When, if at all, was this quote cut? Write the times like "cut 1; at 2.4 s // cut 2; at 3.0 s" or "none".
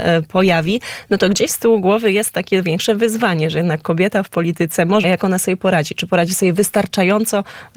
cut 1; at 5.0 s